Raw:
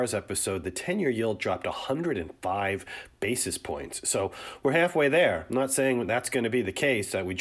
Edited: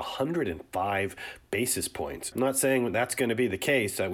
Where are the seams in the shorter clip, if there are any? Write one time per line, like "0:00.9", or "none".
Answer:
0:02.3